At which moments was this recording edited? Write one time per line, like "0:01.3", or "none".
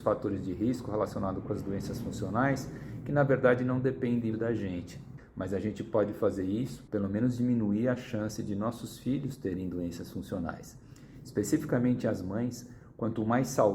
0:04.3